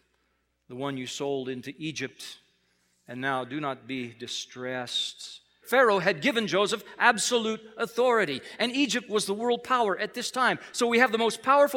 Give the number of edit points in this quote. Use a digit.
1